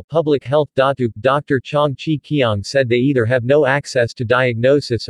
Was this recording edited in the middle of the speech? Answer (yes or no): no